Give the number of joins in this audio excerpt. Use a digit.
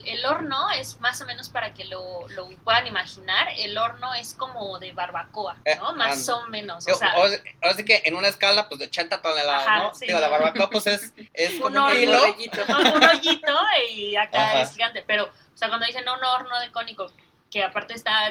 0